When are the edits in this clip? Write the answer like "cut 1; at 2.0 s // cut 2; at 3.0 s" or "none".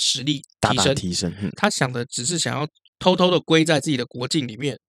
cut 1; at 1.5 s